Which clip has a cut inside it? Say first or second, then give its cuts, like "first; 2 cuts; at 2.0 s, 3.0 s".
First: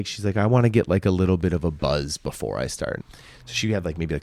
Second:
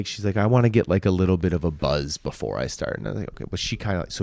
first; 1 cut; at 3.0 s